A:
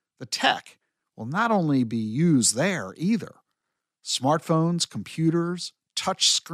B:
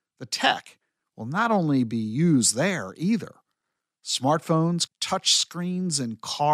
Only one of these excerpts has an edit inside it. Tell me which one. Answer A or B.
B